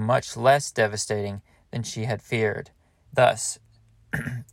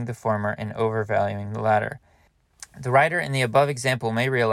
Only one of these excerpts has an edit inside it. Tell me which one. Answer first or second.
first